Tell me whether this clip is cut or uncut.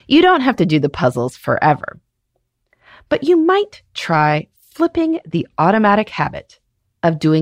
uncut